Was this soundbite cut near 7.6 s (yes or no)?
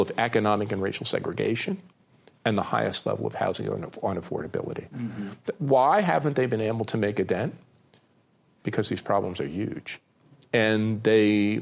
no